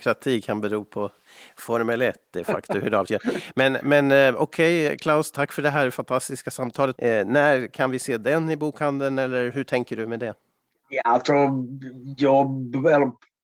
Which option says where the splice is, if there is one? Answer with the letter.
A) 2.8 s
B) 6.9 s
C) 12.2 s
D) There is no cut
B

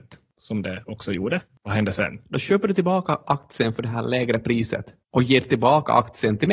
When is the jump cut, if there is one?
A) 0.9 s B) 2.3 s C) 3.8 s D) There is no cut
B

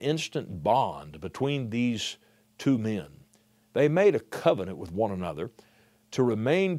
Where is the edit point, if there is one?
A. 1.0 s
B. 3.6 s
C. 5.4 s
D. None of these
B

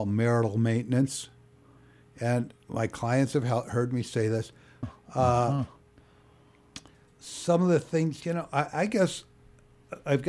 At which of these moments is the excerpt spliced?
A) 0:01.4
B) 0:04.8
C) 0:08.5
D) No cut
B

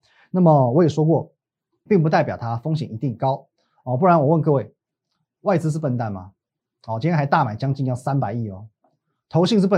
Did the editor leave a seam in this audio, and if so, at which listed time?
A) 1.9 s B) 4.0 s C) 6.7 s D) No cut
A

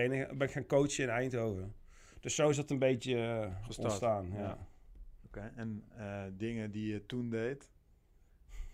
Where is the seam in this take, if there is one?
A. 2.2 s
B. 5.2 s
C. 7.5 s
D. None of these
B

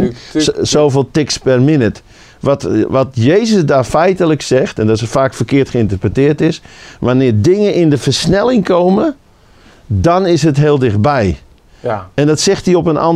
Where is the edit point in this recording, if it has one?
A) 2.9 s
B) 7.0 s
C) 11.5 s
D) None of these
D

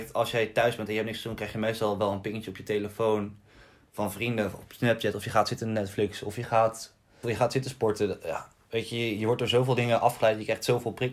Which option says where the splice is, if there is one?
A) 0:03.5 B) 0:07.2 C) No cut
B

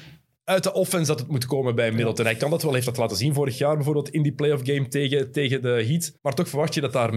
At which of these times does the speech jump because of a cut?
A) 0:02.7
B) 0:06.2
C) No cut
B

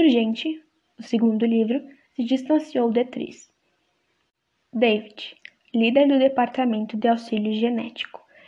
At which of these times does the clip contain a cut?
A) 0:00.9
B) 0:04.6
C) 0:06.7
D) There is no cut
B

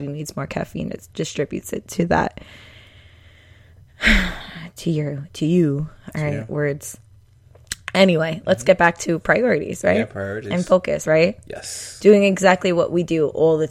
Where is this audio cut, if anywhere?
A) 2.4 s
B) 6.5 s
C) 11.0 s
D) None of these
C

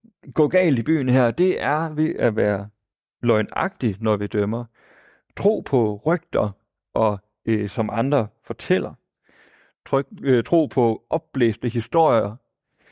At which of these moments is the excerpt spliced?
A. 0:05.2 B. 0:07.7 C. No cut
B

